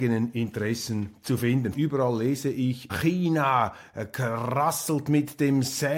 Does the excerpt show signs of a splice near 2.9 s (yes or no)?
yes